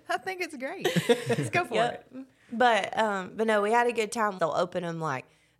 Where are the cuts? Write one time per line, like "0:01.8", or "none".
0:04.4